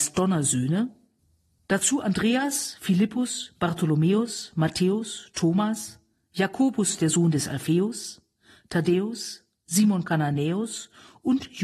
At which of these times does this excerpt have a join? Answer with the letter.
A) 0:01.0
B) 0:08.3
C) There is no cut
C